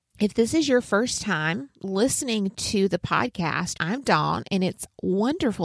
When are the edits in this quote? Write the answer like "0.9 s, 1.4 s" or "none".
3.7 s